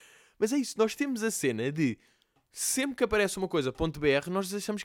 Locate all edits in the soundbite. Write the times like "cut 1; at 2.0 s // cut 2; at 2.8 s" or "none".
none